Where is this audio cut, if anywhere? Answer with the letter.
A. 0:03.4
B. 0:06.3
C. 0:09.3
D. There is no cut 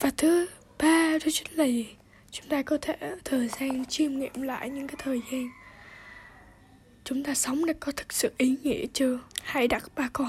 C